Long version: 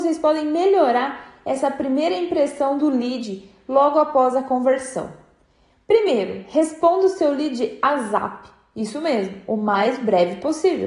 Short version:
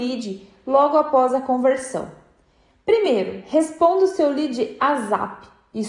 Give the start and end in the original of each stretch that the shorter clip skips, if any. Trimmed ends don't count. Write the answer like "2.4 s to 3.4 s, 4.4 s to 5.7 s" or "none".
none